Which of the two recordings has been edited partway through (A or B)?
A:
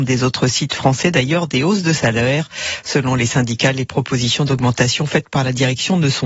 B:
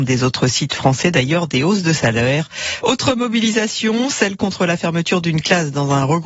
B